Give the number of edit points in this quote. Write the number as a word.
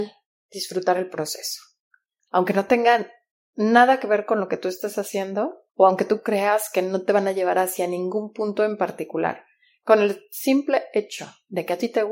two